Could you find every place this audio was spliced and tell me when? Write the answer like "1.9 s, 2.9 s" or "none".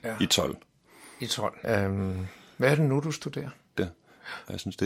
1.6 s, 3.7 s